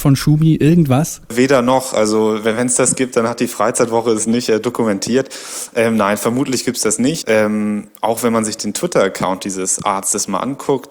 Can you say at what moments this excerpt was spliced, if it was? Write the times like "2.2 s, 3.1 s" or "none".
7.2 s